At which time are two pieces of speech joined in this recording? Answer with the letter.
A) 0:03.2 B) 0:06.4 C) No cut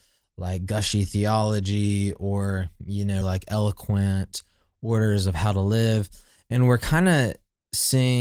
A